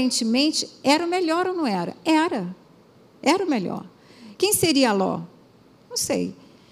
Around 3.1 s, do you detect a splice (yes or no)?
no